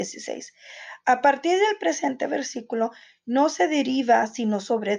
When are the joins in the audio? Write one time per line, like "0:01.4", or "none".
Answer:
none